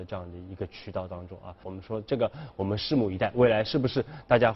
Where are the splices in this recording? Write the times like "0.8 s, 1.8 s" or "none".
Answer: 1.6 s